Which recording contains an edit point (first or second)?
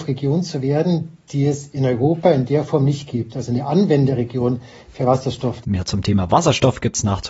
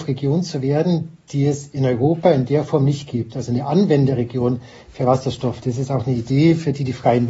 first